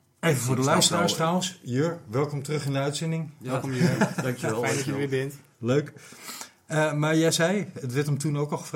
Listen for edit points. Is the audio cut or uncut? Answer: uncut